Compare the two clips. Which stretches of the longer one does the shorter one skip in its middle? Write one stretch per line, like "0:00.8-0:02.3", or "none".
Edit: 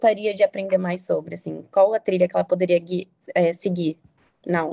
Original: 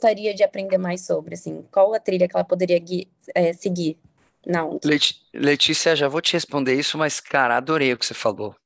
none